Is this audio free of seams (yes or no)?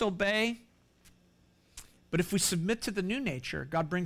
yes